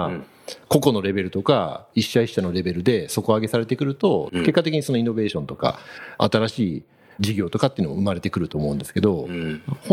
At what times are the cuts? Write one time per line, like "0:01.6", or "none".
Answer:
0:04.3